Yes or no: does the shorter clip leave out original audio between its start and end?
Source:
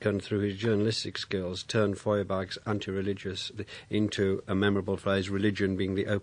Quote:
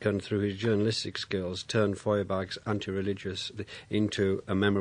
no